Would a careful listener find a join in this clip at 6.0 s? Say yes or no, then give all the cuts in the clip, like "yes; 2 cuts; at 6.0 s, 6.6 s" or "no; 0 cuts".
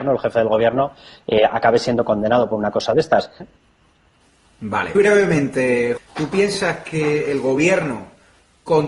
yes; 3 cuts; at 3.4 s, 4.9 s, 6.0 s